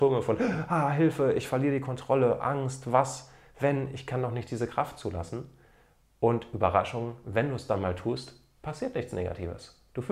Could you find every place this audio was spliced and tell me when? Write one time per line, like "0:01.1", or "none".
none